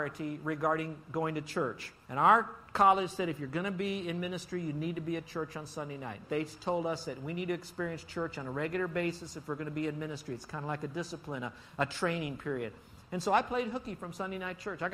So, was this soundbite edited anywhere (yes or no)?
no